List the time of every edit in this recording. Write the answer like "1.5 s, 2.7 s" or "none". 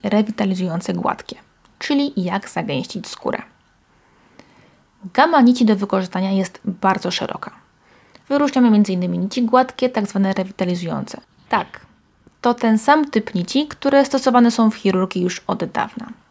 8.2 s, 11.5 s